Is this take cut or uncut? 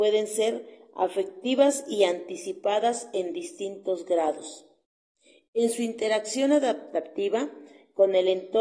uncut